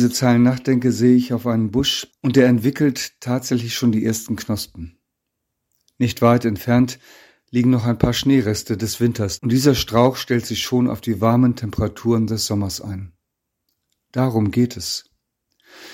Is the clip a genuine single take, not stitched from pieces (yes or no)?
no